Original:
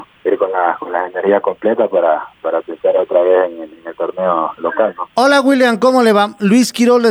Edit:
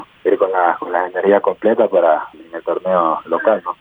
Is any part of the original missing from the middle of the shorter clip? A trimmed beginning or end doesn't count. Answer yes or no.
yes